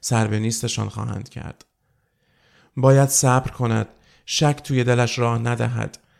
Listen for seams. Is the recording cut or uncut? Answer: uncut